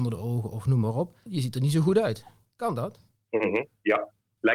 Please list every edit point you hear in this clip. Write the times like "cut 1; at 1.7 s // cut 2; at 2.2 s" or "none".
cut 1; at 1.3 s